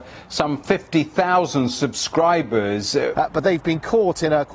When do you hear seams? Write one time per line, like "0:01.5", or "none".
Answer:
0:03.1